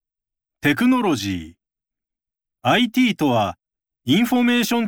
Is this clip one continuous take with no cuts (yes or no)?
yes